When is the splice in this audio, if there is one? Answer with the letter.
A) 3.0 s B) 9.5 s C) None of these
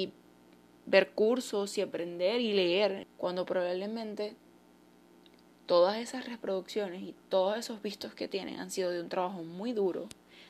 A